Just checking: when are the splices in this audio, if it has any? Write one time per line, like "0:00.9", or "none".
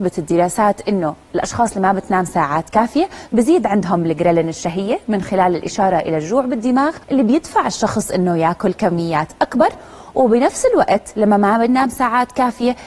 0:07.0